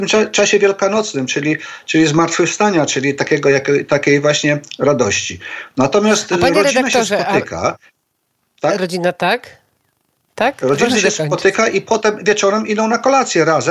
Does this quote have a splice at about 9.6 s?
no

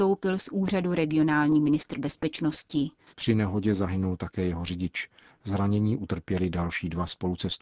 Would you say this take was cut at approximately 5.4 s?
no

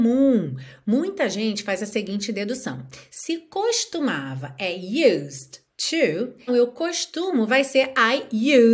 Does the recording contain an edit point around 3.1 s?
no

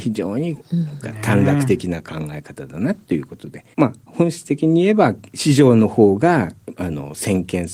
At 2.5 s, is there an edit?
no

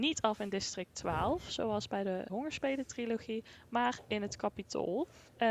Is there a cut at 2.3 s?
yes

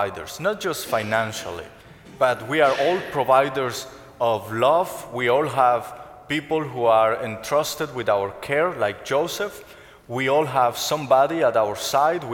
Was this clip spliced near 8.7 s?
no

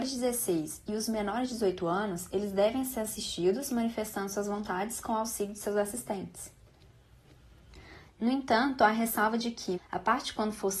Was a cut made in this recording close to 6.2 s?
no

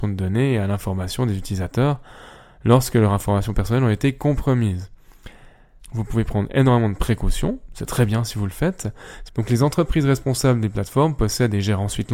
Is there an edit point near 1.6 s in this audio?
no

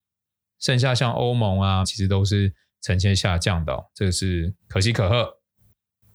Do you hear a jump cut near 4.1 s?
no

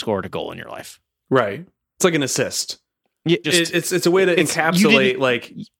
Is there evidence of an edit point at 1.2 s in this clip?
no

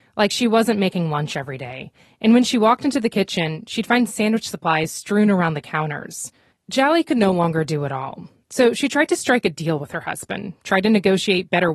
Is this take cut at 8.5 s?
no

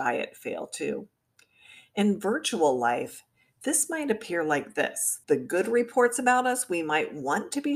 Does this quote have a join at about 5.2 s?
yes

